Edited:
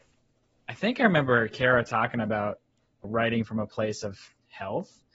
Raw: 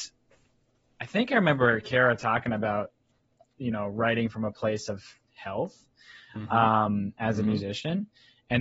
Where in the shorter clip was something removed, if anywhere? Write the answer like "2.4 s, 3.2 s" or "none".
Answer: 3.0 s